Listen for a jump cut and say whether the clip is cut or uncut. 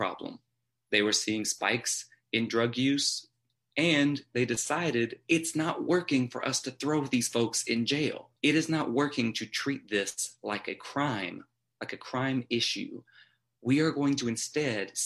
cut